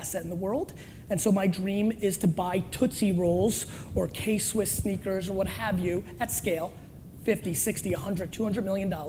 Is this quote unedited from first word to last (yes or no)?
yes